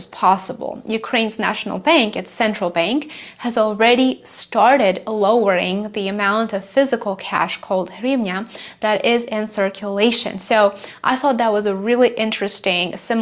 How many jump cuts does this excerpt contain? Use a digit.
0